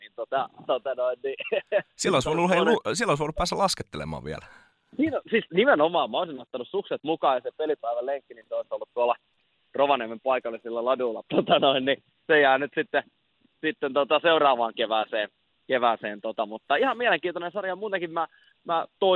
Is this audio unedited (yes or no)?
no